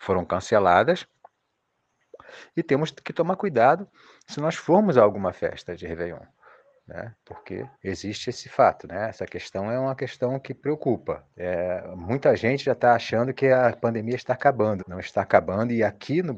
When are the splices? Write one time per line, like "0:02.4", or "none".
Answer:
0:07.7
0:11.3
0:14.8